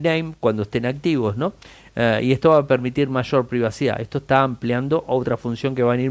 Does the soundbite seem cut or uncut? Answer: uncut